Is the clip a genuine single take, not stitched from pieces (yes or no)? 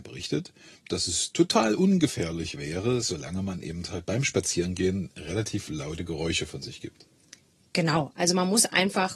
yes